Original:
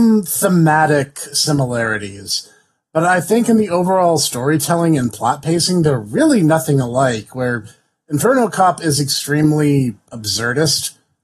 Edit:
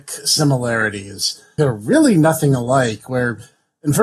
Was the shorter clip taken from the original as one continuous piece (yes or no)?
no